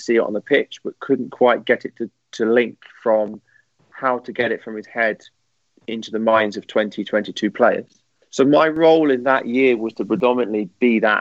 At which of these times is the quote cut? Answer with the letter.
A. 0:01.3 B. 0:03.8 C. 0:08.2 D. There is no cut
D